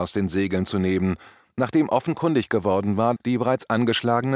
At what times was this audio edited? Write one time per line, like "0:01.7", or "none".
0:03.2